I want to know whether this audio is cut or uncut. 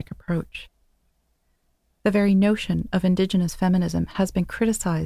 uncut